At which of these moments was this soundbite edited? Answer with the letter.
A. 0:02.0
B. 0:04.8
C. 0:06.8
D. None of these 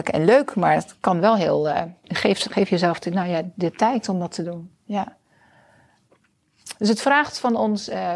A